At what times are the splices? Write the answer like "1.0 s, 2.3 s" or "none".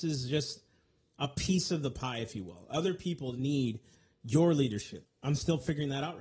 5.1 s